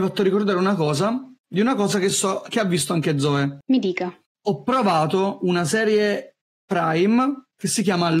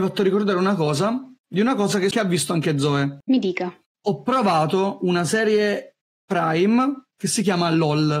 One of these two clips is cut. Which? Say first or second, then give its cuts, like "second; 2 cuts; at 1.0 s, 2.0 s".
second; 1 cut; at 2.1 s